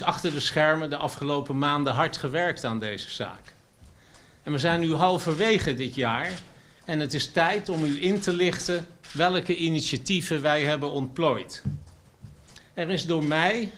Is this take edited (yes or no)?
yes